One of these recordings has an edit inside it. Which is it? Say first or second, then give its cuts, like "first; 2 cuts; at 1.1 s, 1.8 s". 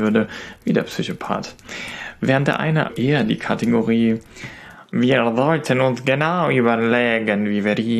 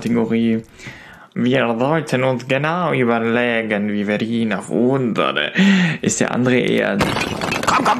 first; 1 cut; at 2.9 s